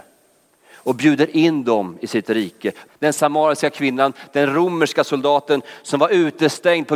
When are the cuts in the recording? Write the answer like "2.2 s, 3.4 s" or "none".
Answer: 2.9 s